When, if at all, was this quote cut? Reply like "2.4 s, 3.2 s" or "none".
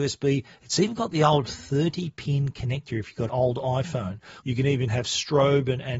3.3 s, 4.4 s